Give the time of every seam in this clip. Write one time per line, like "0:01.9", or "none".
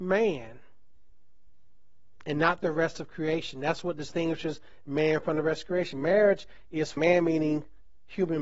0:07.0